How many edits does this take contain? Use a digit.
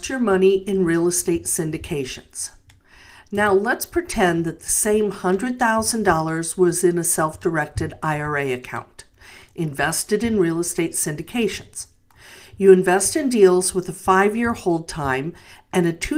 0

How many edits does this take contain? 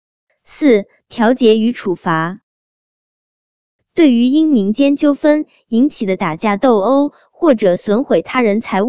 0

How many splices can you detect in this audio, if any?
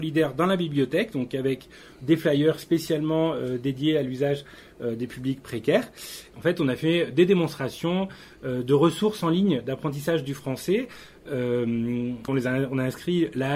2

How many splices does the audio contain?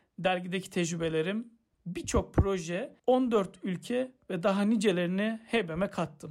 2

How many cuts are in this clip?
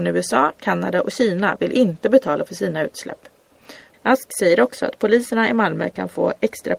1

